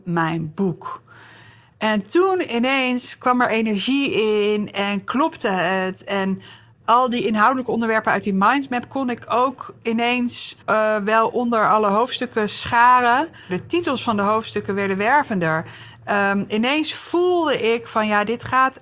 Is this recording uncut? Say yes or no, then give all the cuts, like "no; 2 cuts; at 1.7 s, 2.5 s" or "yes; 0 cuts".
no; 2 cuts; at 10.6 s, 13.5 s